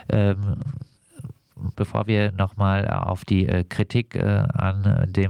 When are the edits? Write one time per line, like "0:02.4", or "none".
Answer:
0:01.7